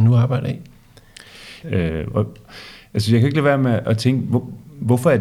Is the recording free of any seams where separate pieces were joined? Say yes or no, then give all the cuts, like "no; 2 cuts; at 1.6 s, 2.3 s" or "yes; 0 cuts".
no; 1 cut; at 1.6 s